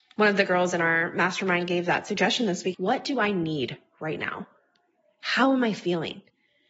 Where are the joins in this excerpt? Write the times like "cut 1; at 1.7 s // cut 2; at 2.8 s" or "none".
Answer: cut 1; at 2.7 s